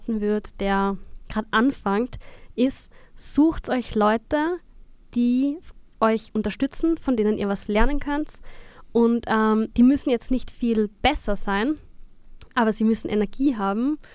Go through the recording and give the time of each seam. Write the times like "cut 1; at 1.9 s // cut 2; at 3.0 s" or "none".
cut 1; at 9.7 s